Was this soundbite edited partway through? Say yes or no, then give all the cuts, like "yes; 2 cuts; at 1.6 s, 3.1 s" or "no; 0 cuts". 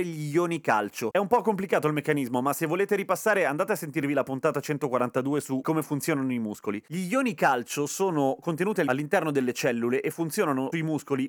no; 0 cuts